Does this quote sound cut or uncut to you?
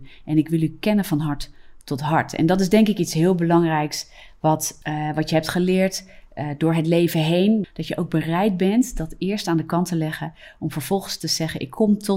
cut